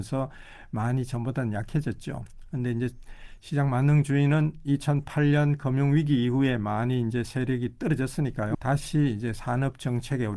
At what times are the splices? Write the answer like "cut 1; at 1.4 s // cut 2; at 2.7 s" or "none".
cut 1; at 8.5 s